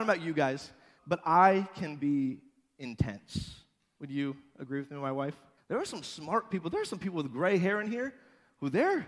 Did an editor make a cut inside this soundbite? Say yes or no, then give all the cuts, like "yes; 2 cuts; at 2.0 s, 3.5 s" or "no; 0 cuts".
yes; 2 cuts; at 1.0 s, 5.6 s